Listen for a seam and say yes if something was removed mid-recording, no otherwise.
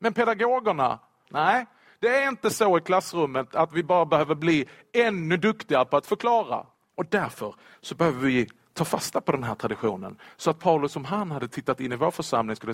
yes